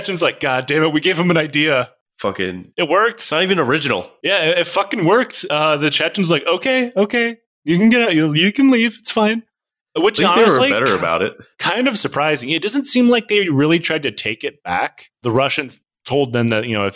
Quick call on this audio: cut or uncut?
uncut